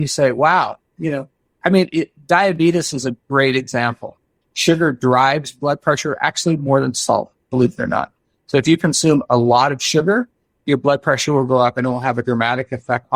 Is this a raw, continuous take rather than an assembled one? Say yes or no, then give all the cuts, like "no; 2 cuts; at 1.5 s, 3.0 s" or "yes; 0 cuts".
no; 1 cut; at 4.4 s